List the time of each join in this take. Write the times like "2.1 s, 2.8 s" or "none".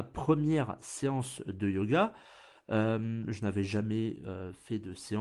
none